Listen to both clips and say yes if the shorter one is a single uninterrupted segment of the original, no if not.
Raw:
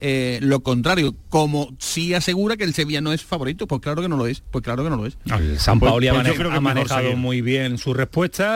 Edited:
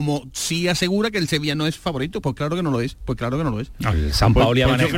yes